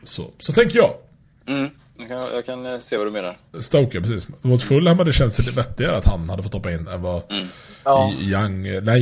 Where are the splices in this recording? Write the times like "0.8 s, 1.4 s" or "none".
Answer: 3.5 s